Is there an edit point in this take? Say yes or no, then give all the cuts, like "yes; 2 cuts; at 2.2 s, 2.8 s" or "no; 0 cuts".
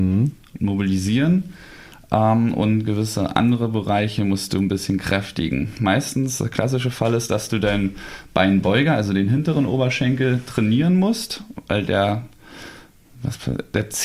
no; 0 cuts